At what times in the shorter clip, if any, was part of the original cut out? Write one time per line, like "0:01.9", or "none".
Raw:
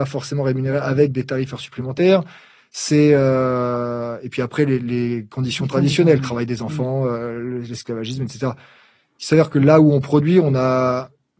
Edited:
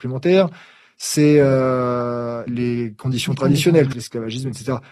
0:02.5
0:03.9